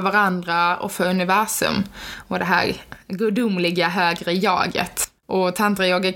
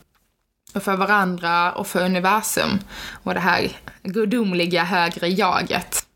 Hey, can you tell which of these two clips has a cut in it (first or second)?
first